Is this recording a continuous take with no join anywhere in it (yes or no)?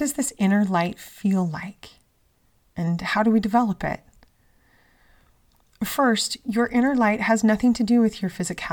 yes